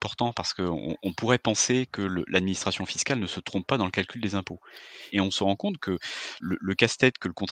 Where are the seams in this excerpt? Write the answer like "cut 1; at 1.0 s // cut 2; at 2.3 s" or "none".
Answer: cut 1; at 5.1 s // cut 2; at 6.4 s